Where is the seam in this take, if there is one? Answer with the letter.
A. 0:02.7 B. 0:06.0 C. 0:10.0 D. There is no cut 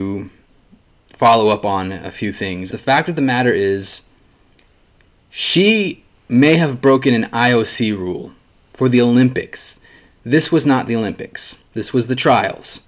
A